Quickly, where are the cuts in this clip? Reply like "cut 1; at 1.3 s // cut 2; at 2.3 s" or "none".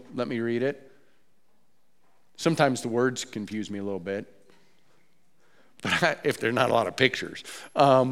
none